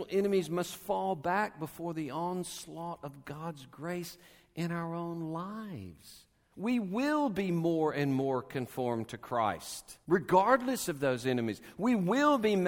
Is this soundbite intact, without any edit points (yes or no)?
no